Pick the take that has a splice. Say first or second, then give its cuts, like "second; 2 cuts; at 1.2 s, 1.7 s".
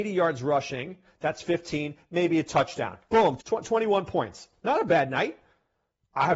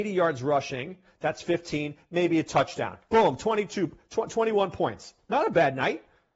first; 1 cut; at 3.4 s